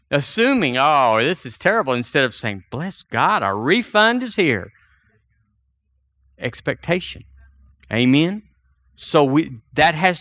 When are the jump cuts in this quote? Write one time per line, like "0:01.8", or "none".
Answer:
none